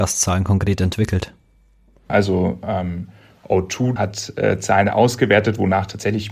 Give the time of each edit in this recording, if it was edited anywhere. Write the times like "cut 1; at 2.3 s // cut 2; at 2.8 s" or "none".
cut 1; at 2.1 s // cut 2; at 4.0 s